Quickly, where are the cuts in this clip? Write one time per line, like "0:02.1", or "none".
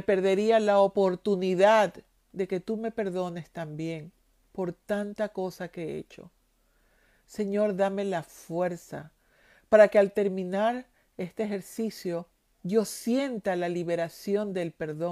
none